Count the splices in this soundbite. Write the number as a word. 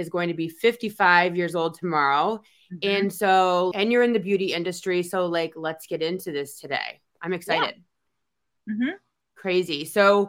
one